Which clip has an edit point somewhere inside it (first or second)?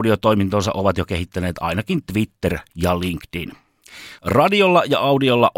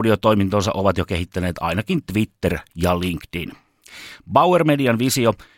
first